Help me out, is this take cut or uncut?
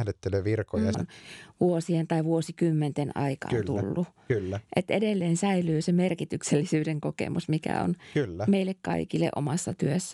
cut